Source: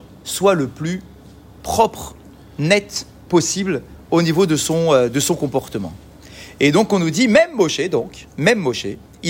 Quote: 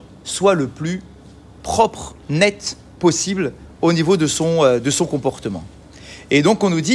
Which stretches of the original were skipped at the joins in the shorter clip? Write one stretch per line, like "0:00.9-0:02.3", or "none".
0:02.2-0:02.5